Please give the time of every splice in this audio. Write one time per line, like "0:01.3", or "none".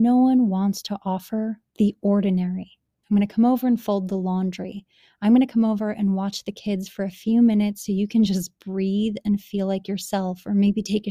0:03.0